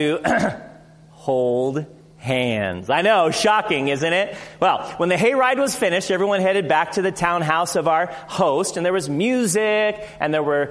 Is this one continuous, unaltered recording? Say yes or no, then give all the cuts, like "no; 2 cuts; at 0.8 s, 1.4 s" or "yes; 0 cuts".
yes; 0 cuts